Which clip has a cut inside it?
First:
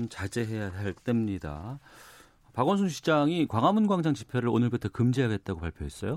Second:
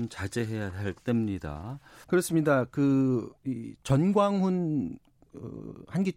second; 2 cuts; at 2.0 s, 3.4 s

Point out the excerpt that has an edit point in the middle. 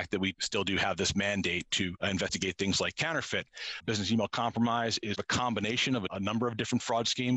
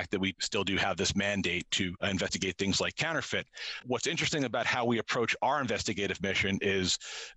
first; 1 cut; at 3.8 s

